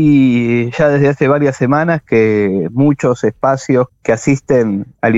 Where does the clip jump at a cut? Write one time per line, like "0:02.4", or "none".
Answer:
0:03.9

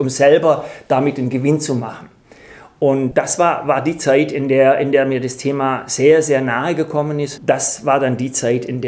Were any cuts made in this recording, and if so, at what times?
0:07.4

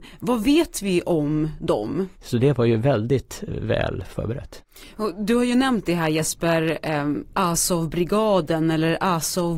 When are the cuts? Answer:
0:02.1

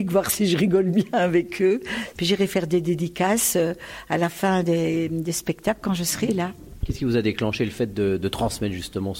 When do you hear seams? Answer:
0:02.1

